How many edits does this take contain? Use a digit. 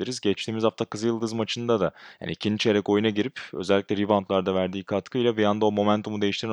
0